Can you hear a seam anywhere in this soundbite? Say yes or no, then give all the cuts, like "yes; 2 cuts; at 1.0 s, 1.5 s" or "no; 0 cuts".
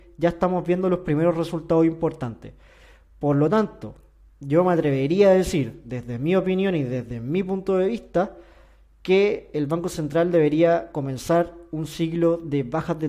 no; 0 cuts